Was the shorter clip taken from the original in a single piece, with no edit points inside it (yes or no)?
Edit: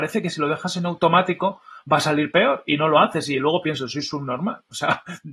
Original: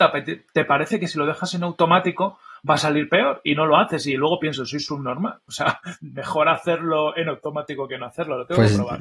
yes